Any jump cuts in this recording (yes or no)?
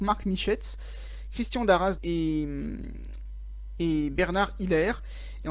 yes